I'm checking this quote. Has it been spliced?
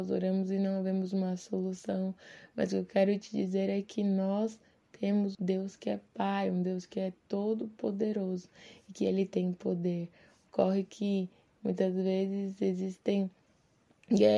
yes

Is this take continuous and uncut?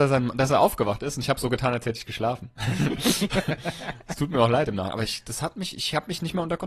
yes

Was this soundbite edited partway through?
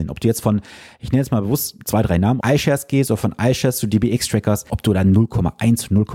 yes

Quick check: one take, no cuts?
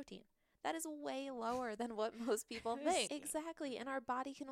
no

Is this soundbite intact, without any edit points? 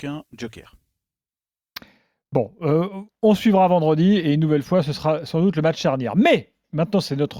yes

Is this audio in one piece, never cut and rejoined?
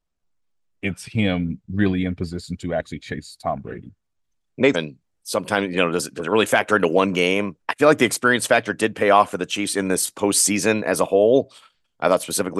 no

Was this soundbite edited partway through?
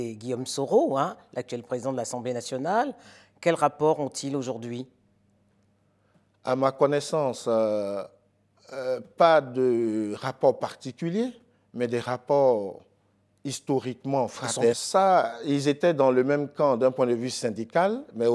yes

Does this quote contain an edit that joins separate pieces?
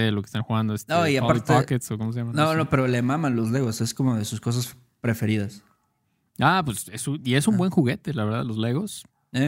no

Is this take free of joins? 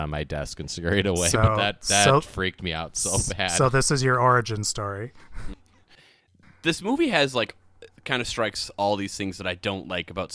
yes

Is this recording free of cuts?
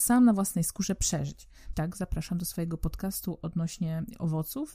no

